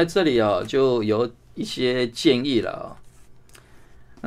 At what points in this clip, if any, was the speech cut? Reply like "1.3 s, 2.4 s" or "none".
none

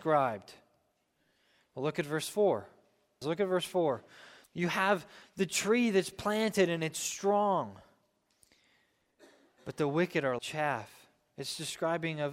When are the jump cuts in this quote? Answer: 3.2 s, 4.4 s, 10.4 s

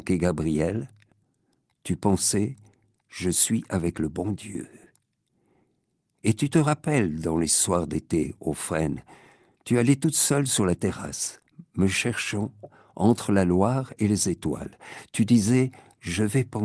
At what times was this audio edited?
none

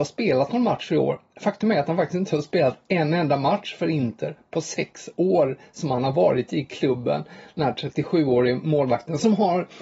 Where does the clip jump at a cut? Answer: none

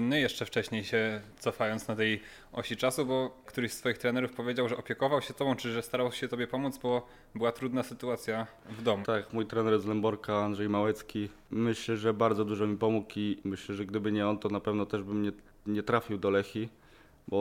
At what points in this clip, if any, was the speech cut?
9.0 s

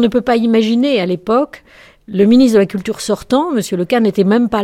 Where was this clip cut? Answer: none

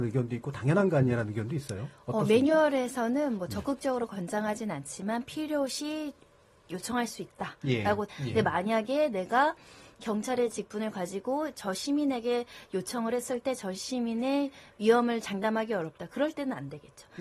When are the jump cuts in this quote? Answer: 8.1 s

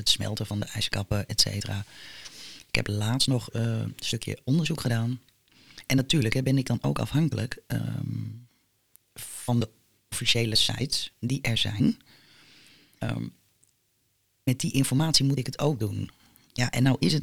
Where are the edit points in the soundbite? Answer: none

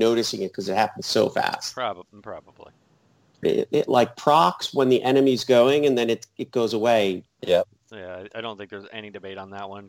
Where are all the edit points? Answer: 3.4 s, 7.2 s

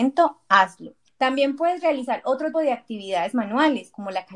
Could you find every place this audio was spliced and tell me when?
1.1 s, 2.5 s

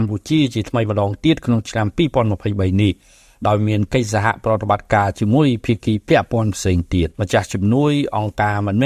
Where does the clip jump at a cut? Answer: 7.1 s

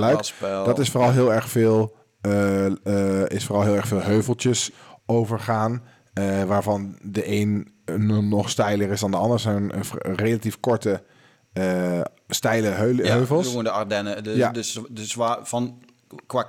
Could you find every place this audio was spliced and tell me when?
none

